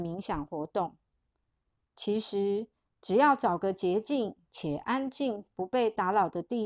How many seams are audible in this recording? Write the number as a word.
one